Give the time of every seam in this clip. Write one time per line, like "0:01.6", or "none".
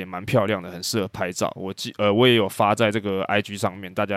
none